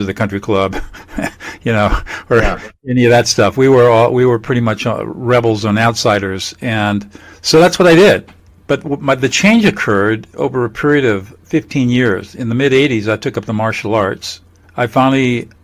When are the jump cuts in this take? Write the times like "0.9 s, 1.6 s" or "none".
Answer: none